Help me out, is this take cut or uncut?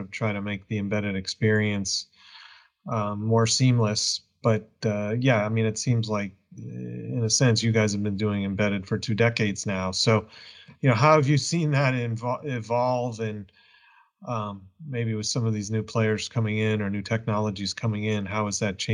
uncut